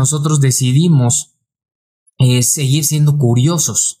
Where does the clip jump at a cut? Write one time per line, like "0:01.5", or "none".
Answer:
none